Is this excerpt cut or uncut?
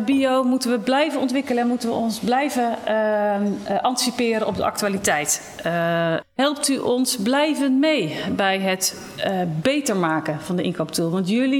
cut